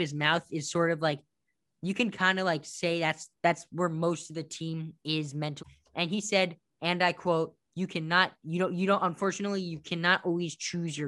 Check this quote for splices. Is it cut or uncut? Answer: cut